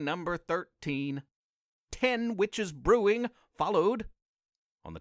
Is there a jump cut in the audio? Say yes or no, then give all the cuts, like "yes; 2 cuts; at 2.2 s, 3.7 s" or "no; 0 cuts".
yes; 1 cut; at 1.8 s